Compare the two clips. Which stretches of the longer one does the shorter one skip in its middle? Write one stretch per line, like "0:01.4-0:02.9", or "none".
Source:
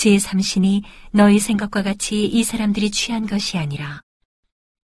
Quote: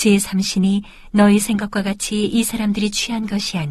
none